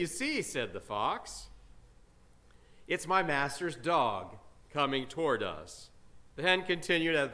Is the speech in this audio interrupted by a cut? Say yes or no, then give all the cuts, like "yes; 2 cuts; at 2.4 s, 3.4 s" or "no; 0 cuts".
yes; 1 cut; at 6.3 s